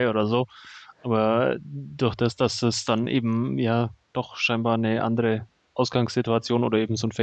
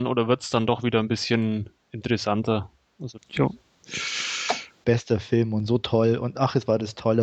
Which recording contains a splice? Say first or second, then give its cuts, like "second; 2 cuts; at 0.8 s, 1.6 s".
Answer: second; 2 cuts; at 3.2 s, 4.8 s